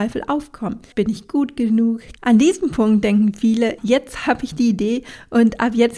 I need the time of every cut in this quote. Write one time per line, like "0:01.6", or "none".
0:00.9
0:02.2
0:03.8